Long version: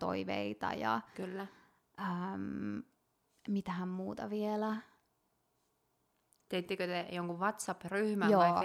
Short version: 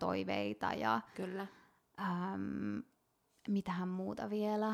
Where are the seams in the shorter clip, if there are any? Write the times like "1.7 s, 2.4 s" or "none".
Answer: none